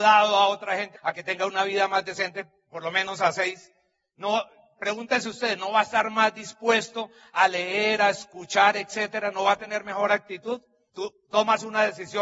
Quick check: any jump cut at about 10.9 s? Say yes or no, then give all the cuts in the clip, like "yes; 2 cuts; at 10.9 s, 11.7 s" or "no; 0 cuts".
yes; 2 cuts; at 0.9 s, 10.9 s